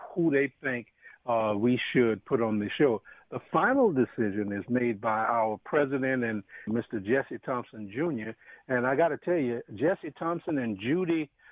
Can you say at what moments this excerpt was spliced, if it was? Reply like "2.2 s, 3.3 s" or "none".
6.7 s